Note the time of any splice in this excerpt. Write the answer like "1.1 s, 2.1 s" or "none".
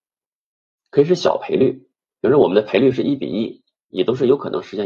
3.9 s